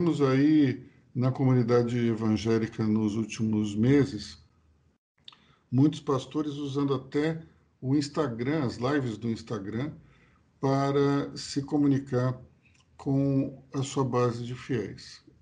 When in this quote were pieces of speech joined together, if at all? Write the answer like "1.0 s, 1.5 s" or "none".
none